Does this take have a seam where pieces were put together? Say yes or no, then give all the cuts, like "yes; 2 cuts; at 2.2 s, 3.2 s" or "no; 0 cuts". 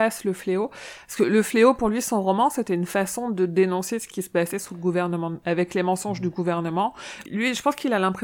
yes; 2 cuts; at 5.4 s, 7.2 s